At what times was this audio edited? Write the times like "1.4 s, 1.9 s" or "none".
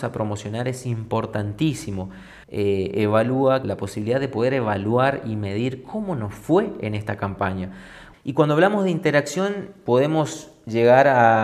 2.4 s, 3.6 s, 8.1 s